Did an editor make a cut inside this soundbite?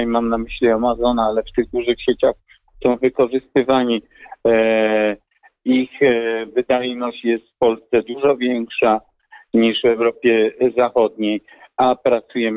no; 0 cuts

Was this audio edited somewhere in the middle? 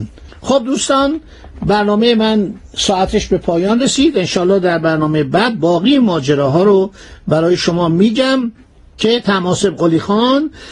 no; 0 cuts

